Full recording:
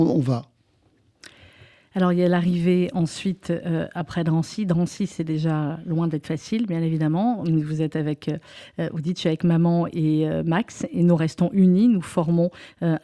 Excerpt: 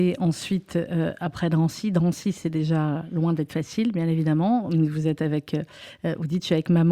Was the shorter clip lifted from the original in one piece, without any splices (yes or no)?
yes